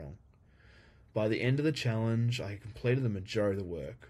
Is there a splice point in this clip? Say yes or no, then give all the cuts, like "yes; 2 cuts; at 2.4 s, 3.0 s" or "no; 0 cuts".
yes; 1 cut; at 1.0 s